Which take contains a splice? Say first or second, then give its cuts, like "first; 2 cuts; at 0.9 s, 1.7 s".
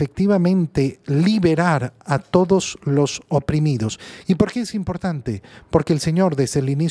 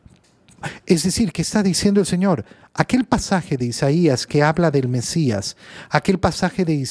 first; 1 cut; at 4.2 s